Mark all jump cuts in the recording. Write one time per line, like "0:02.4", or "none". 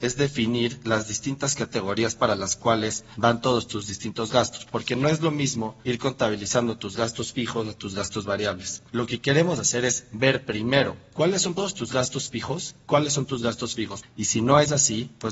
0:11.6
0:14.0